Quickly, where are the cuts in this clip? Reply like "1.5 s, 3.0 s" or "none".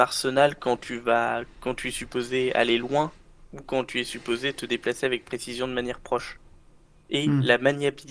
none